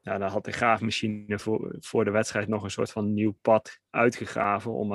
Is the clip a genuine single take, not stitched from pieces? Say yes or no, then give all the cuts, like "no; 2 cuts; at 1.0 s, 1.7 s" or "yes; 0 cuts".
no; 1 cut; at 3.9 s